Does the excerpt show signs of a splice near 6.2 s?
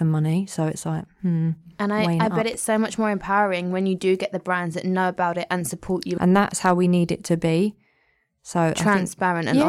yes; 1 cut; at 6.2 s

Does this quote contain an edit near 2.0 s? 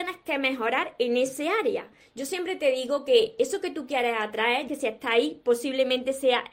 yes; 2 cuts; at 2.0 s, 4.7 s

